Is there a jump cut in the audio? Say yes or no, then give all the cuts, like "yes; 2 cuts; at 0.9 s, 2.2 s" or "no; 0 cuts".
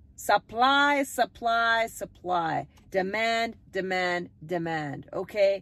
no; 0 cuts